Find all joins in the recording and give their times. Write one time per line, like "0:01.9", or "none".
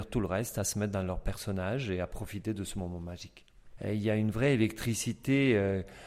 0:03.8